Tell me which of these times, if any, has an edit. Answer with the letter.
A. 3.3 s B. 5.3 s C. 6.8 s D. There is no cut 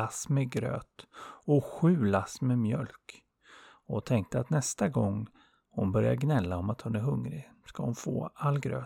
D